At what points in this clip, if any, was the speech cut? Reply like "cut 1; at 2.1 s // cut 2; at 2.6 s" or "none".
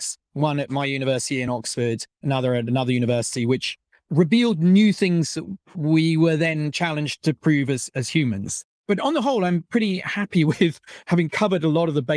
none